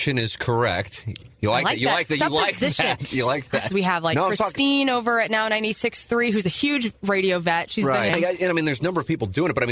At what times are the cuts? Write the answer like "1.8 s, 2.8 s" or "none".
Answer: 3.7 s, 8.1 s